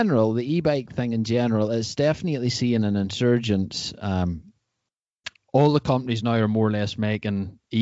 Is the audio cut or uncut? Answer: uncut